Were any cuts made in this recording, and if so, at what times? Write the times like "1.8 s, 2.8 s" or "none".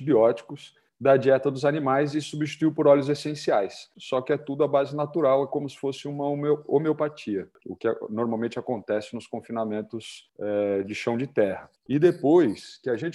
3.9 s, 7.6 s